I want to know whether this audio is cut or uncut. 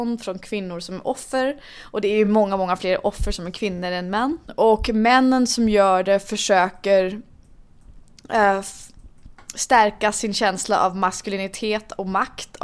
uncut